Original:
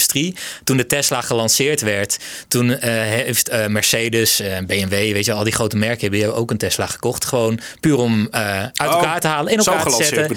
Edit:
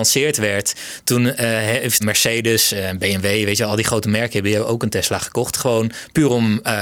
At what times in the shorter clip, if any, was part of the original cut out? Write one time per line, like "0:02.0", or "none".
0:02.0